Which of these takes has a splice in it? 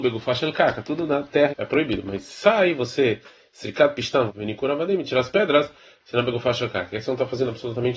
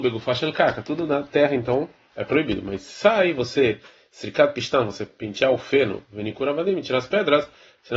first; 2 cuts; at 1.5 s, 4.3 s

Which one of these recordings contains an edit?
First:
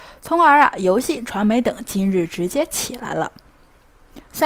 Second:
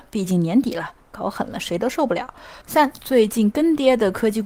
second; 1 cut; at 2.6 s

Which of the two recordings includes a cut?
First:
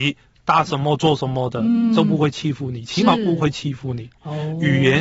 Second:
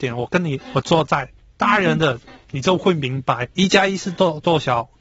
second; 1 cut; at 3.6 s

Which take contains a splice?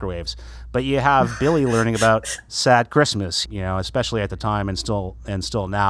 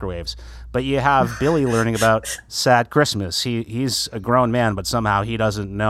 first; 1 cut; at 3.4 s

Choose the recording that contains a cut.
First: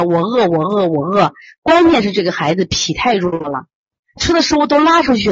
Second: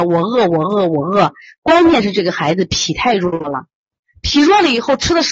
first; 1 cut; at 4.2 s

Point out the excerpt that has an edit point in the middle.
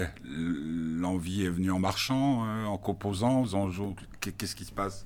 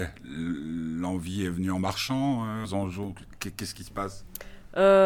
second; 1 cut; at 2.6 s

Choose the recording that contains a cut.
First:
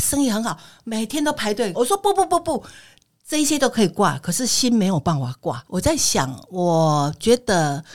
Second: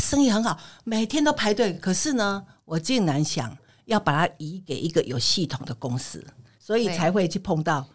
first; 2 cuts; at 1.7 s, 5.6 s

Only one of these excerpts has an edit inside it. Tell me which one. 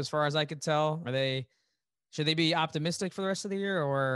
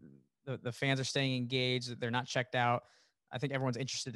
first; 1 cut; at 1.0 s

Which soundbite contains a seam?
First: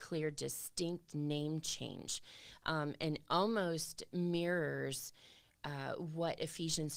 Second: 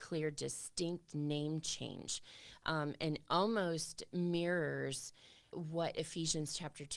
second; 1 cut; at 5.5 s

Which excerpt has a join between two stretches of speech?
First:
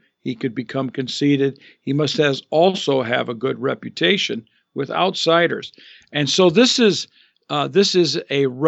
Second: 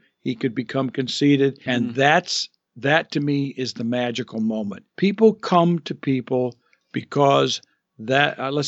second; 2 cuts; at 1.7 s, 4.9 s

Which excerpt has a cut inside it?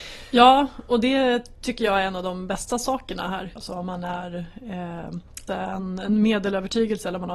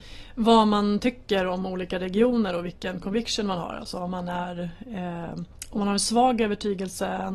first; 2 cuts; at 3.6 s, 5.5 s

